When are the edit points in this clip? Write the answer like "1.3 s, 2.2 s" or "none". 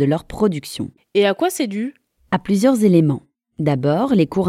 none